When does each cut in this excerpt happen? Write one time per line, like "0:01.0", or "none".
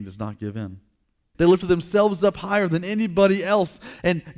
0:01.3